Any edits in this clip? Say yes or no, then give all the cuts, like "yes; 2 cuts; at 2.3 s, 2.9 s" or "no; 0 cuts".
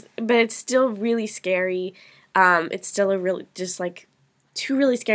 no; 0 cuts